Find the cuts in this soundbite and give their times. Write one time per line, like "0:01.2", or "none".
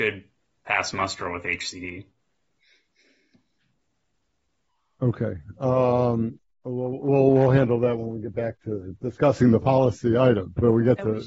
none